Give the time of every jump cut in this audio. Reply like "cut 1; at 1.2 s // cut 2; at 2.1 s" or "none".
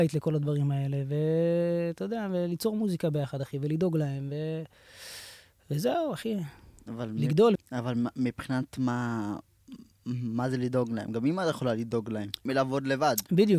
cut 1; at 7.6 s // cut 2; at 12.5 s